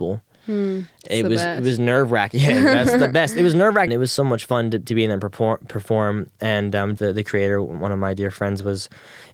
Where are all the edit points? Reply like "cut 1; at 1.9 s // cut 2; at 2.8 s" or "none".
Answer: cut 1; at 3.9 s // cut 2; at 7.0 s